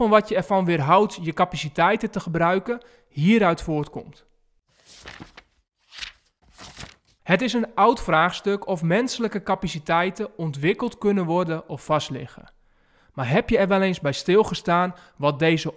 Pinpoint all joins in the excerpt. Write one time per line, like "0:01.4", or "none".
none